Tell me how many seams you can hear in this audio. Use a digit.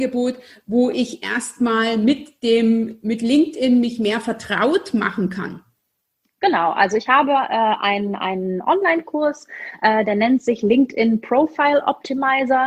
0